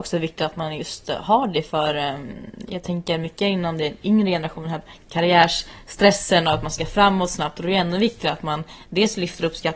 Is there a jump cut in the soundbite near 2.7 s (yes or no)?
no